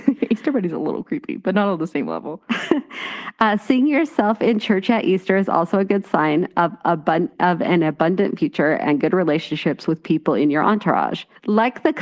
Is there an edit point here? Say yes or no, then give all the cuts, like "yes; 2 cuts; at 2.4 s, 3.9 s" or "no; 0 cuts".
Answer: no; 0 cuts